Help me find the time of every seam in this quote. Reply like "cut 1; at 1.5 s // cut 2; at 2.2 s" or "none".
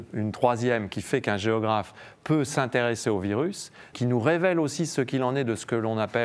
cut 1; at 3.9 s